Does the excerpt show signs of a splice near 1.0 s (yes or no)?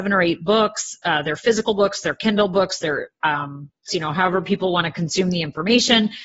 no